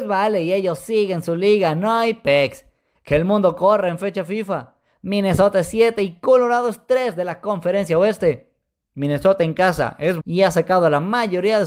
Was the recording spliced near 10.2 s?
yes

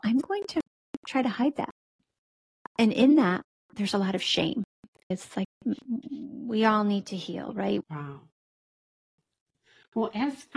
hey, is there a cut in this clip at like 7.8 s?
yes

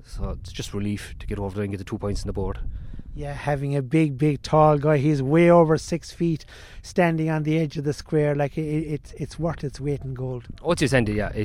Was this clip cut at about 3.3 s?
no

